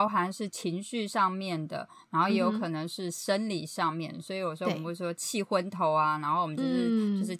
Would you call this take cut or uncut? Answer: uncut